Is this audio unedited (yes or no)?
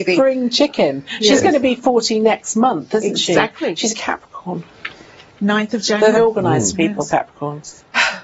no